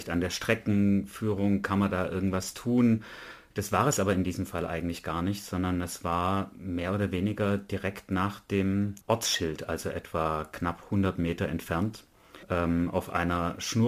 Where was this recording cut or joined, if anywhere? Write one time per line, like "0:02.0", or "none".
0:03.5
0:09.0
0:12.4